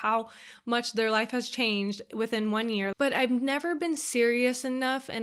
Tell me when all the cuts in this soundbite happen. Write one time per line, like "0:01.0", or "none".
0:02.9

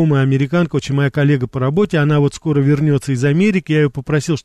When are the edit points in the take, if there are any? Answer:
none

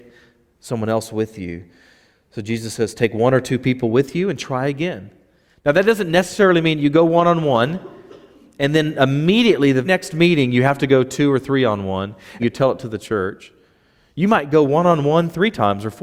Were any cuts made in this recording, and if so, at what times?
0:09.8
0:12.4

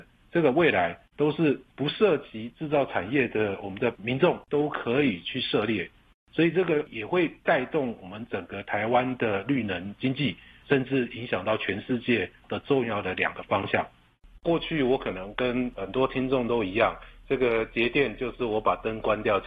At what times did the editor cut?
0:14.4

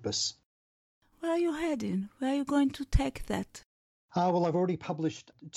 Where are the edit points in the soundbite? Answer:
none

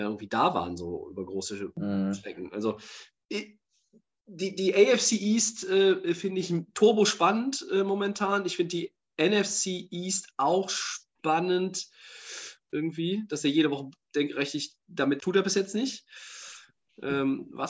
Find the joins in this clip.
0:12.6
0:15.2

